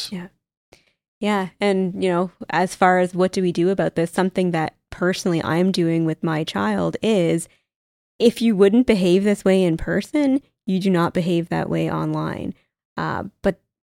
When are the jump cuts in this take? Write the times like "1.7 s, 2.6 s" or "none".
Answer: 12.8 s